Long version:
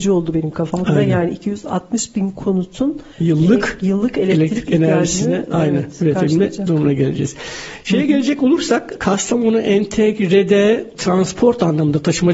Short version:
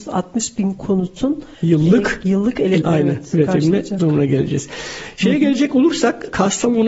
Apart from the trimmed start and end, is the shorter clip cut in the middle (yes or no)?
yes